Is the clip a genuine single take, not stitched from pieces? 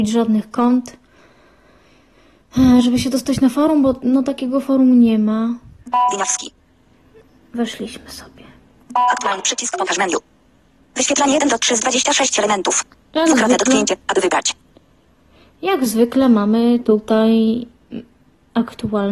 yes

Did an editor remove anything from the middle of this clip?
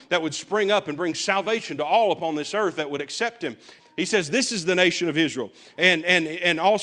yes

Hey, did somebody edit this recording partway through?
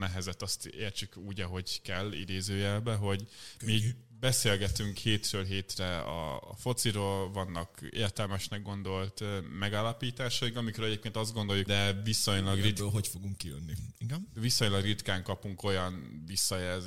yes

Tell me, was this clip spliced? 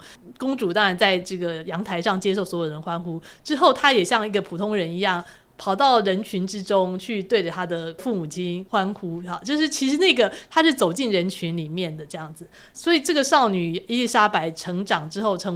no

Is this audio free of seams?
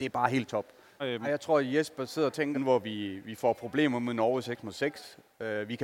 no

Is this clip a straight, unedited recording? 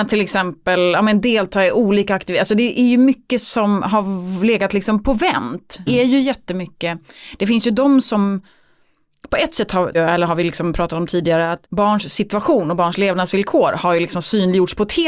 no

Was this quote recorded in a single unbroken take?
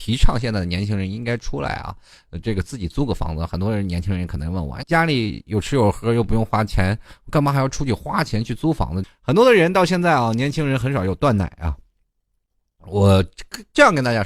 no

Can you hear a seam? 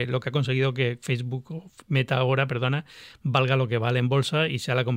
no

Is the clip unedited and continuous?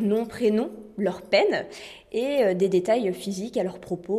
yes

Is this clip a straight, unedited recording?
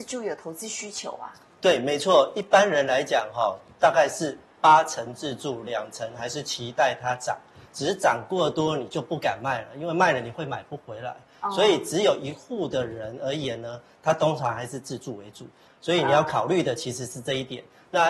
no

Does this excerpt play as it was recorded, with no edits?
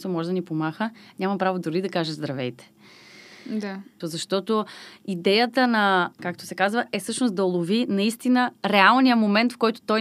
no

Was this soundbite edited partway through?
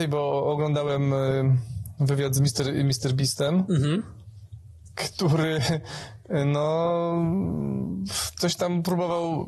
no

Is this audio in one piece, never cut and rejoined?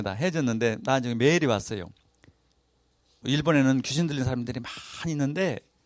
no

